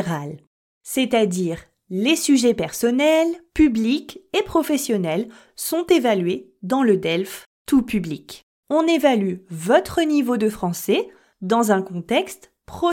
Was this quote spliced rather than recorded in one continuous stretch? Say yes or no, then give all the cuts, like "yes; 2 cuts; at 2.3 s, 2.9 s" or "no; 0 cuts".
yes; 1 cut; at 8.5 s